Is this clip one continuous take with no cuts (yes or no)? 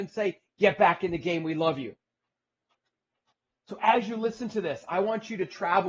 yes